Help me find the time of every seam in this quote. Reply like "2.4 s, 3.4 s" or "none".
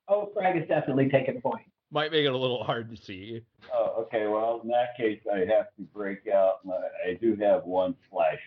1.8 s